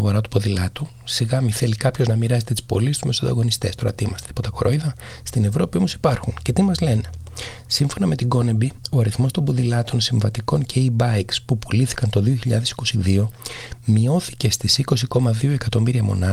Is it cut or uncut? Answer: uncut